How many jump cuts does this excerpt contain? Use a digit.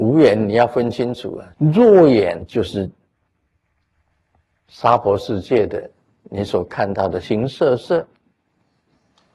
2